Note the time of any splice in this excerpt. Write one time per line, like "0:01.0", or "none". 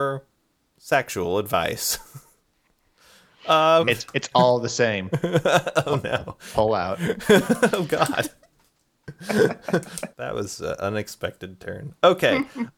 0:03.8
0:10.1

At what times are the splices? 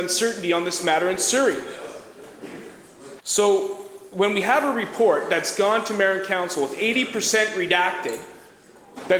0:03.2

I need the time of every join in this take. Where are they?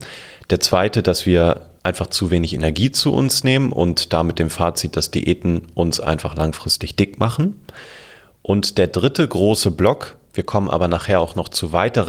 0:01.8

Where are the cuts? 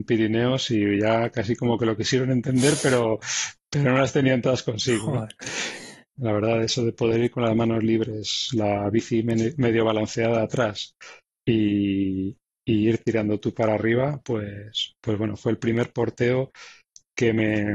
0:06.1

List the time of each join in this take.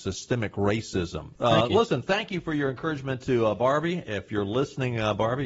0:01.4

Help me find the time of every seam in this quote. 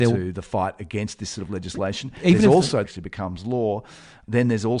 0:02.8

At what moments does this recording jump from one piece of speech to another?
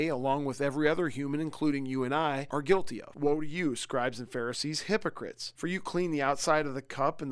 0:03.1

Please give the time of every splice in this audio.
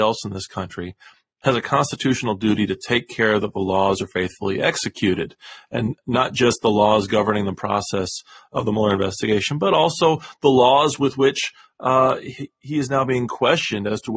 none

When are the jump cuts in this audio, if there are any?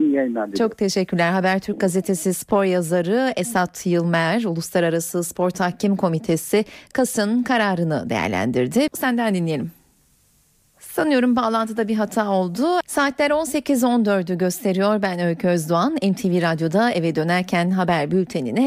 0:08.9
0:12.8

